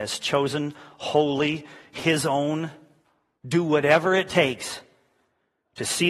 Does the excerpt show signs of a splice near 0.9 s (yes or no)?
no